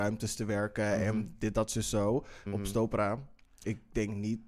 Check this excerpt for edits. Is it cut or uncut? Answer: cut